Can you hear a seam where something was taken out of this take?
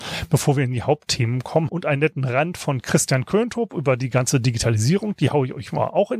yes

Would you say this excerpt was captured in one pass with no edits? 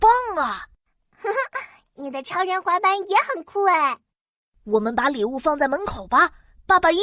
yes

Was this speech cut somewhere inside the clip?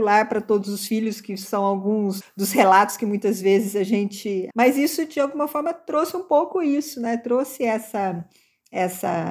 yes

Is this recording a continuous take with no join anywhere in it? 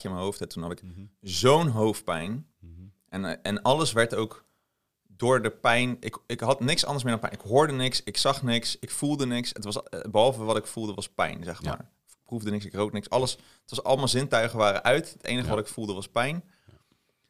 yes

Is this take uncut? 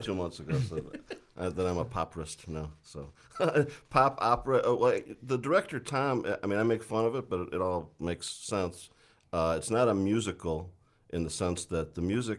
yes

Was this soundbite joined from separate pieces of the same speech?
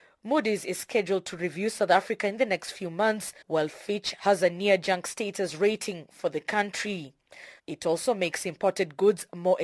yes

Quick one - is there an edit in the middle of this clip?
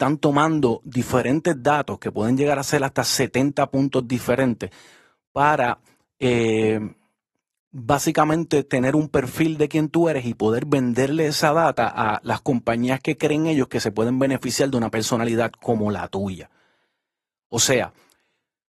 no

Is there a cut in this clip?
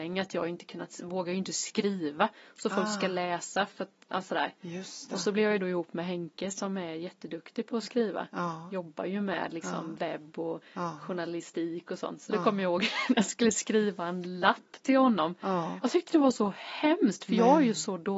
no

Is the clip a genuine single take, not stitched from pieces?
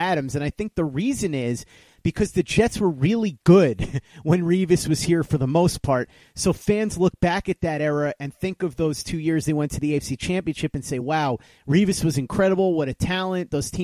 yes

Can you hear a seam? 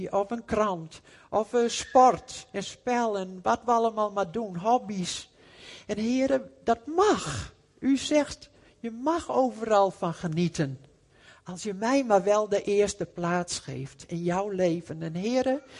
no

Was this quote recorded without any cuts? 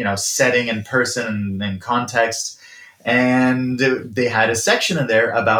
yes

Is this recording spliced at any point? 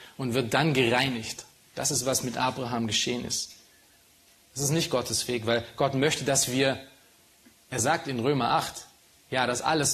yes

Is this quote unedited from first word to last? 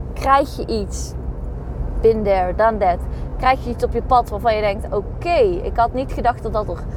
yes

